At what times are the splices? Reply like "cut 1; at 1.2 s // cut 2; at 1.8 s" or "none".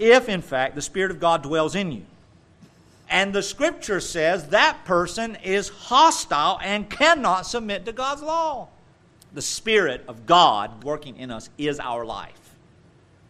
cut 1; at 3.0 s // cut 2; at 9.2 s // cut 3; at 10.8 s